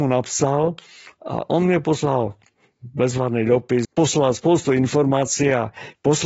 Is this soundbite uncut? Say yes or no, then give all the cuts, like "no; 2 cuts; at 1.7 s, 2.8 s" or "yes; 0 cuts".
no; 1 cut; at 3.8 s